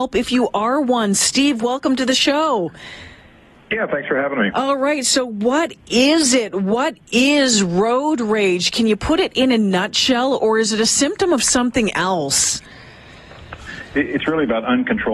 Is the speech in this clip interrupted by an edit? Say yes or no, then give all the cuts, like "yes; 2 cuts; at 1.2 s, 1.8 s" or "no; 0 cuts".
no; 0 cuts